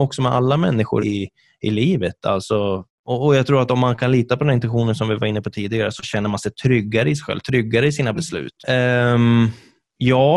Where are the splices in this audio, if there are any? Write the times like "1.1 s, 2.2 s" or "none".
1.0 s, 8.6 s